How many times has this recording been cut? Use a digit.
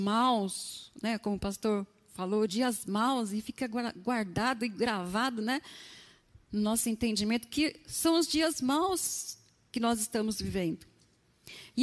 0